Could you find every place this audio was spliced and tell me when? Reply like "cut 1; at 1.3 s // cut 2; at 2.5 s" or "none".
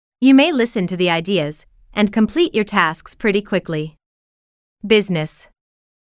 cut 1; at 1.8 s